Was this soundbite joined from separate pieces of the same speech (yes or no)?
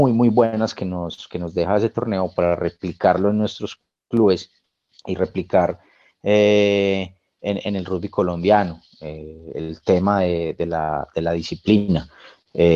no